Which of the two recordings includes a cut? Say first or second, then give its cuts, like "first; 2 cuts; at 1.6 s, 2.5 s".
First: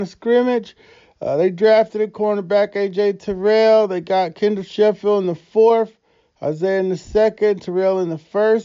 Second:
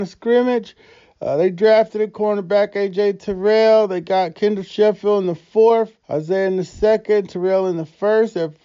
second; 1 cut; at 6.0 s